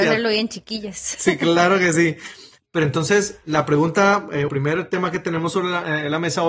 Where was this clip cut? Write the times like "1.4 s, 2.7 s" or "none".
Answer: 2.6 s, 4.5 s